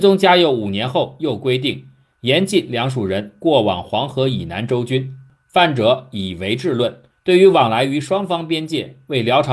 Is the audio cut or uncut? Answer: cut